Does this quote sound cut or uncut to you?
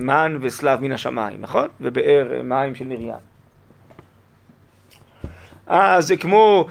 uncut